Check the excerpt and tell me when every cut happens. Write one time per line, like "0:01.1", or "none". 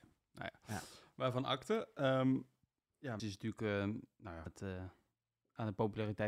0:03.2
0:04.5